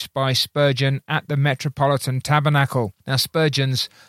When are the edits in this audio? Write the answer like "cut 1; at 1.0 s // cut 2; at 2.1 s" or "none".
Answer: cut 1; at 3.0 s

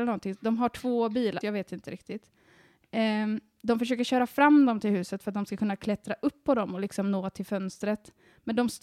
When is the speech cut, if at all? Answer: cut 1; at 1.4 s

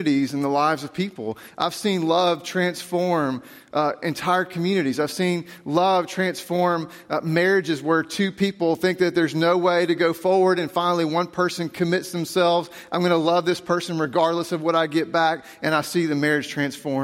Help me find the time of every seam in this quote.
none

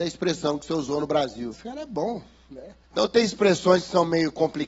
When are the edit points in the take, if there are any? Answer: cut 1; at 1.5 s // cut 2; at 2.8 s

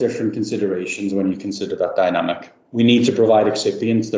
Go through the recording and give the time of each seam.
none

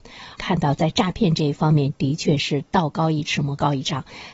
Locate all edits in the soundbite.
none

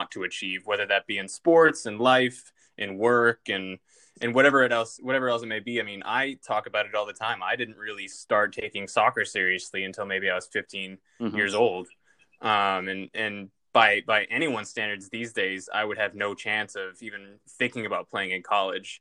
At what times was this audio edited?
none

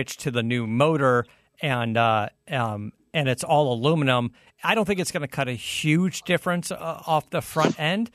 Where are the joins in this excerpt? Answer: none

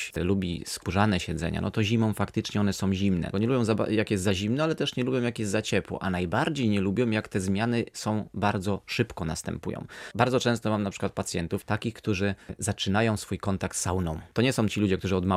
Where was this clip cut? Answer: cut 1; at 3.3 s

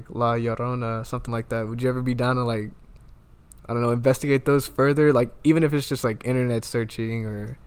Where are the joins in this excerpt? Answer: none

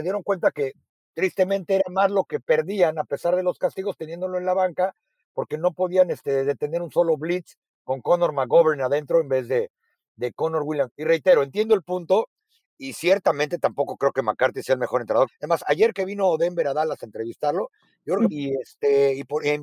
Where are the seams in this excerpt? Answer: cut 1; at 15.3 s // cut 2; at 18.3 s

